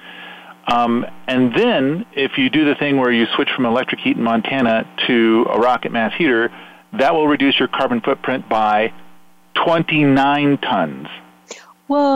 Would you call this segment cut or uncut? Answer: uncut